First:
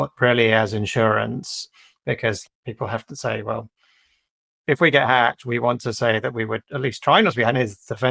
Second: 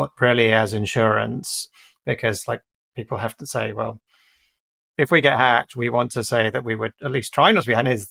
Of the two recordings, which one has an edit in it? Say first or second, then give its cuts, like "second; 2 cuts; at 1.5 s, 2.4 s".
first; 1 cut; at 2.5 s